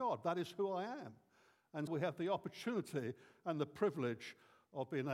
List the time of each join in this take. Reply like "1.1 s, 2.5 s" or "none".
1.9 s